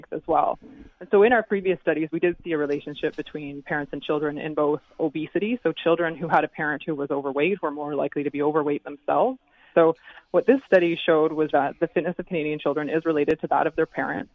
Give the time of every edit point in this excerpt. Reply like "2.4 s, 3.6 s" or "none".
9.7 s, 11.5 s